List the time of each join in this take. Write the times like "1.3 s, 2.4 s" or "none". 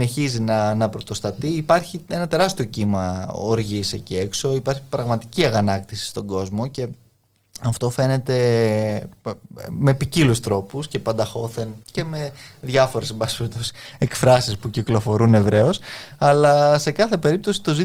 11.8 s